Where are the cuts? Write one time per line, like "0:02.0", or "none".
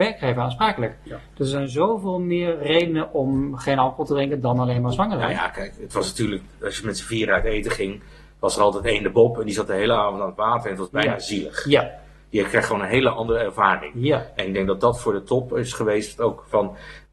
none